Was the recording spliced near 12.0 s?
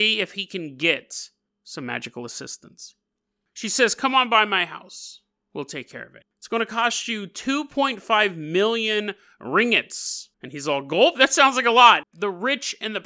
yes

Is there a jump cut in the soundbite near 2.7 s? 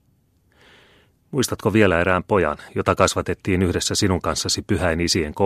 yes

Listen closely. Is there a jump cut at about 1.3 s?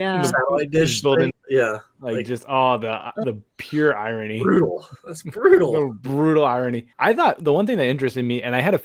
yes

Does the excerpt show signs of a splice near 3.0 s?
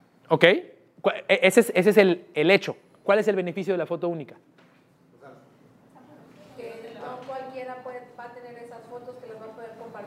yes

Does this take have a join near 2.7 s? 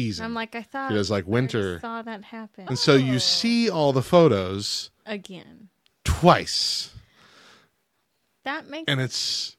yes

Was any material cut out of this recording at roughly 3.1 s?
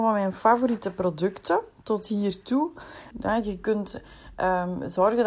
yes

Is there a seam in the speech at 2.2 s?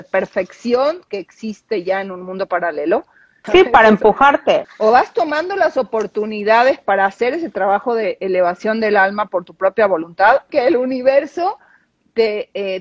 no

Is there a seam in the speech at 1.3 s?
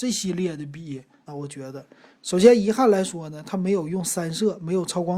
yes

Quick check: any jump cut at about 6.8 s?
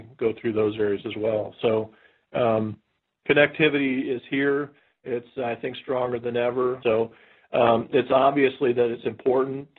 yes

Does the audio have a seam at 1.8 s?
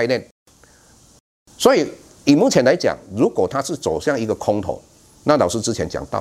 no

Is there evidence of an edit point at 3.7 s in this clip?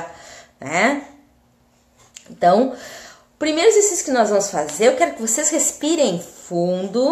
no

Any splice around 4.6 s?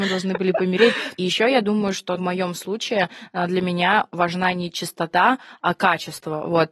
no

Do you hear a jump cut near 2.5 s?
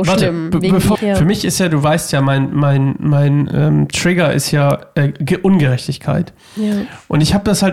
no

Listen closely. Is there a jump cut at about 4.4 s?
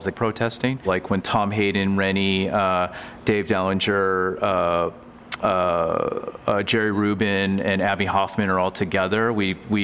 no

